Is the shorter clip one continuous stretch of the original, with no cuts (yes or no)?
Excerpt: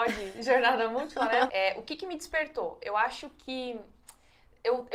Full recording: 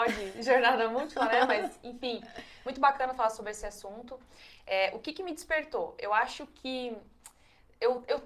no